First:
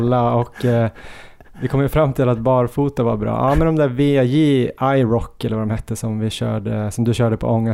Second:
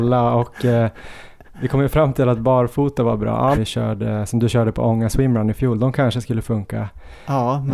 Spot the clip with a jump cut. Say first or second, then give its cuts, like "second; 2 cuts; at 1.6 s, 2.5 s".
second; 1 cut; at 3.5 s